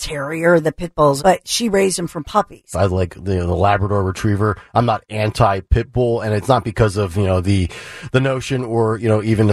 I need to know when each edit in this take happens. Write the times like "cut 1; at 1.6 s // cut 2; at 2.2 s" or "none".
cut 1; at 1.2 s // cut 2; at 2.7 s